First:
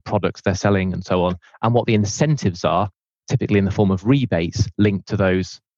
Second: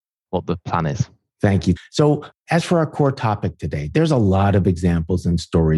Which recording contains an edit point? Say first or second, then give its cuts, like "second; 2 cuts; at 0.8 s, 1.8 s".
second; 1 cut; at 1.8 s